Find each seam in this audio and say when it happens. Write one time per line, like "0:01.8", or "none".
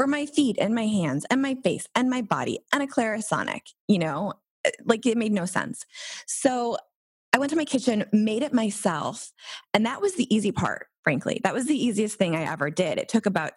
none